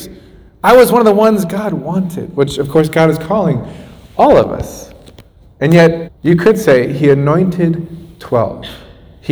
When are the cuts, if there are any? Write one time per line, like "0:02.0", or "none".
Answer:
0:06.0